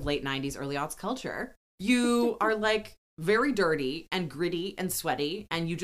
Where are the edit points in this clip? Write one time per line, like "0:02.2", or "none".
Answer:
0:01.6